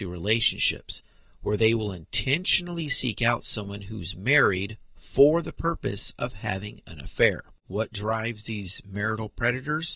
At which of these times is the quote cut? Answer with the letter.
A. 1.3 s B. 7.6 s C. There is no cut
B